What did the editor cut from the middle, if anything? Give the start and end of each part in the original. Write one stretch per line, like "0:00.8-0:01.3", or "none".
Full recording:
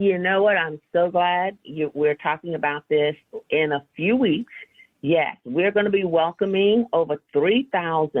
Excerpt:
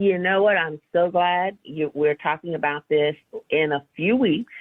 none